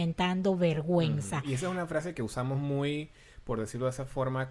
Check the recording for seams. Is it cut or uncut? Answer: uncut